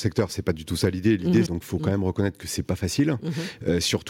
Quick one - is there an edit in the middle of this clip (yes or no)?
yes